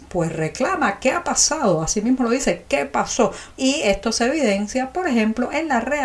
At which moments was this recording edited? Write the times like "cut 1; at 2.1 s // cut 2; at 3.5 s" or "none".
cut 1; at 3.6 s